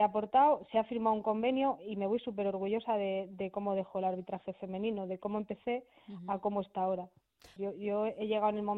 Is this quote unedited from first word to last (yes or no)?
no